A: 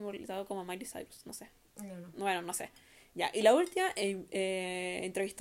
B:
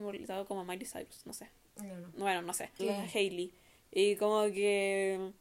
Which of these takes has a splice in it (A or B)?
B